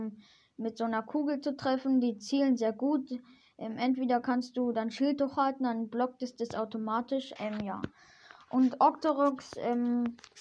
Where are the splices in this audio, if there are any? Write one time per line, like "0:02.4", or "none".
0:07.4

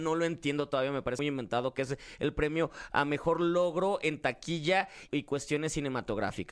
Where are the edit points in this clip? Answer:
0:01.2
0:05.1

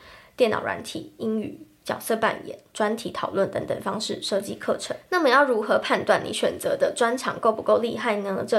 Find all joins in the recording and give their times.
none

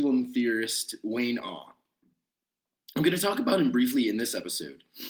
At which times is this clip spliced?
none

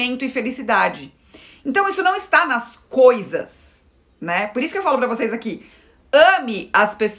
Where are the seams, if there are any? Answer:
none

